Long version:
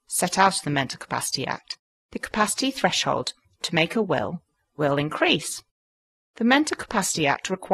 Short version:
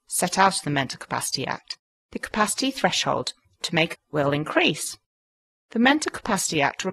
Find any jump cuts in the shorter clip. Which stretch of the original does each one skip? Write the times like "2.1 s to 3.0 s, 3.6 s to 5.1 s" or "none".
3.9 s to 4.6 s